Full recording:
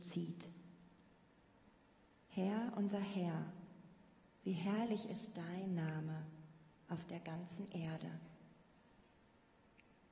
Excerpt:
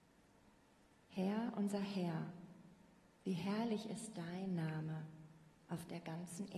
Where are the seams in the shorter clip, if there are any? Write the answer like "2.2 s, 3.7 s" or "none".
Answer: none